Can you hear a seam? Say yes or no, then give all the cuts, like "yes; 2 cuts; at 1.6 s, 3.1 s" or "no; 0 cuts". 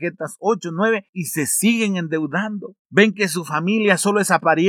no; 0 cuts